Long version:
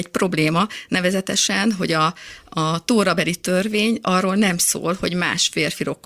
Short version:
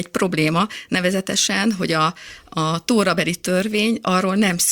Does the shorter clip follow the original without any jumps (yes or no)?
yes